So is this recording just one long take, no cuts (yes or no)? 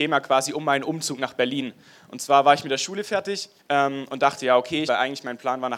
no